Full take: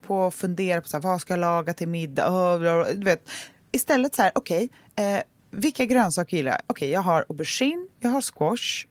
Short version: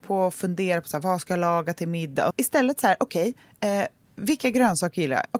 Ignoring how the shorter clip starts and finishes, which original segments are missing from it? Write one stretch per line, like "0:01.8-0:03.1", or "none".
0:02.3-0:03.7